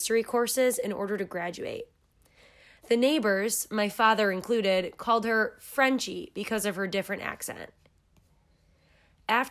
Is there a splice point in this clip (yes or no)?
no